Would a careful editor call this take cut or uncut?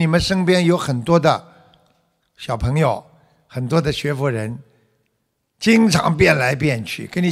uncut